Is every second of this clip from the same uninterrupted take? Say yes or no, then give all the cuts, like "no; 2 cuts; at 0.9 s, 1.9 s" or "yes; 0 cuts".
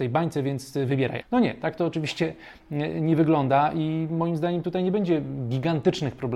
no; 1 cut; at 1.2 s